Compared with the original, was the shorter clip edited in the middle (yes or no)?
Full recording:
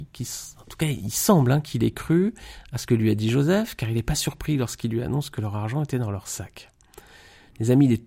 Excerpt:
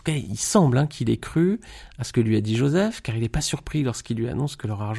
no